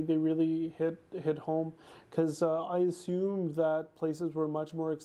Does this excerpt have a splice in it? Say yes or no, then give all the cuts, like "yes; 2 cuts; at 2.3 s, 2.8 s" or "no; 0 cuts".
no; 0 cuts